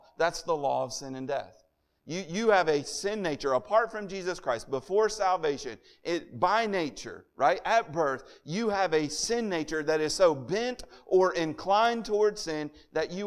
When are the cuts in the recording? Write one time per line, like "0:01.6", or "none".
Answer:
none

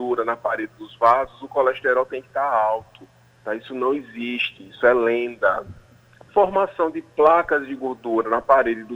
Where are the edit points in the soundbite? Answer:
0:06.2

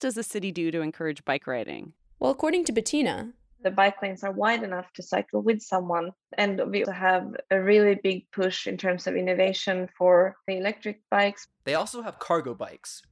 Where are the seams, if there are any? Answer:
0:06.8

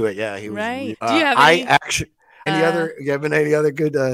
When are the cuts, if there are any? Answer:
0:00.9
0:02.5

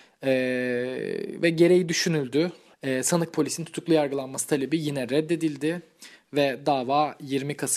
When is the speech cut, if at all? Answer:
0:02.7

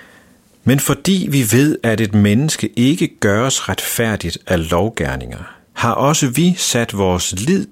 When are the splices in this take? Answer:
0:05.7

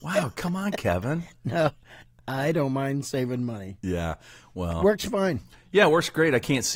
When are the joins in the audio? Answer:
none

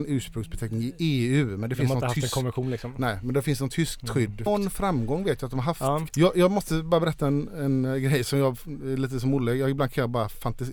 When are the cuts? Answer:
0:04.5
0:06.1

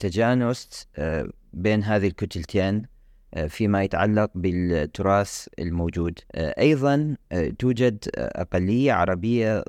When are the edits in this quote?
0:06.3

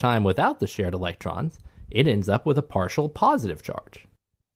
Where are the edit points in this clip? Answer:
none

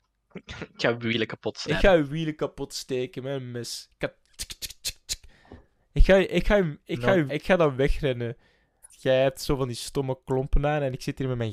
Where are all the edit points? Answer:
0:07.3
0:08.8

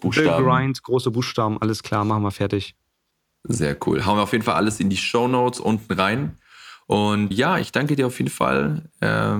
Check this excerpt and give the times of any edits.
0:07.3

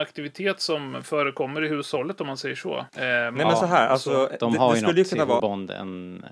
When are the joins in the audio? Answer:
0:02.9
0:05.4

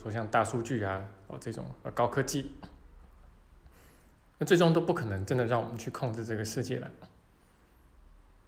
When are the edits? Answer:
none

